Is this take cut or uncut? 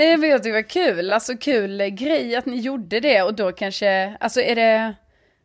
uncut